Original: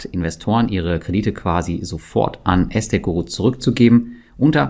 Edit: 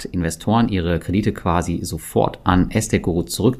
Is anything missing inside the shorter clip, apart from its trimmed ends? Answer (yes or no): no